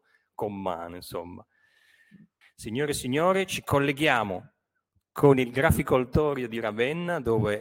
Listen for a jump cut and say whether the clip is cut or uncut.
cut